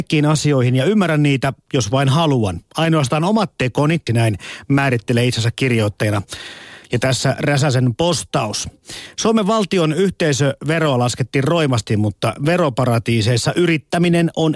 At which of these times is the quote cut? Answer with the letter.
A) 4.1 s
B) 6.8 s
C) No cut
A